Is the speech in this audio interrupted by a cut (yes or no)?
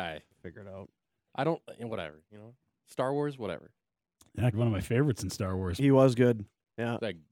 yes